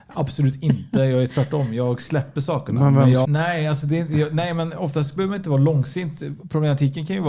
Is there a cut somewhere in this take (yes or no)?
yes